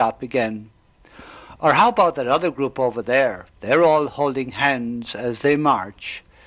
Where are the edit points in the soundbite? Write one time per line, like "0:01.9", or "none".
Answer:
0:03.5